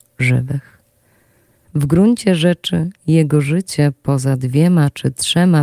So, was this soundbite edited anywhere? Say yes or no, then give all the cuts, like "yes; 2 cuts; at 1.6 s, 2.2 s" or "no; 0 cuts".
yes; 1 cut; at 1.6 s